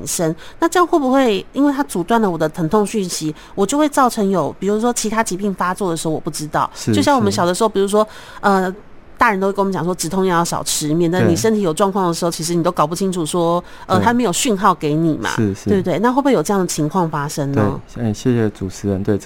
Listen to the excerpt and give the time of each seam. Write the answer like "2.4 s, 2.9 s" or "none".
none